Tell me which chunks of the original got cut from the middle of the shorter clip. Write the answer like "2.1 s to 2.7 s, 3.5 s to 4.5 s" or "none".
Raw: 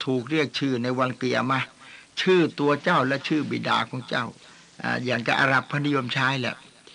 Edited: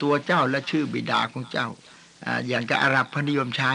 none